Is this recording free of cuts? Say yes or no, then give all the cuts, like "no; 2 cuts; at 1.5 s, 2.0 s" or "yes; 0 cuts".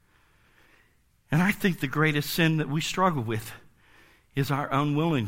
yes; 0 cuts